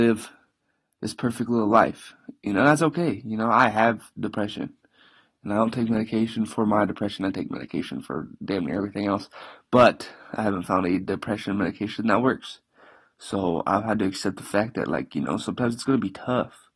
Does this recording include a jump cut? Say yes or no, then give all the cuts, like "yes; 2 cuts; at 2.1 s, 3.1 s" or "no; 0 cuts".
no; 0 cuts